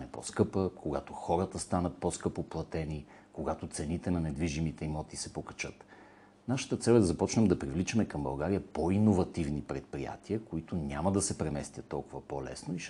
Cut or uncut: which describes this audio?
uncut